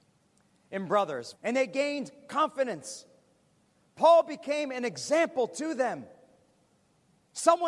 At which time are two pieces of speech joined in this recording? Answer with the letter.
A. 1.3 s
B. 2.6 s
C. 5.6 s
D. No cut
A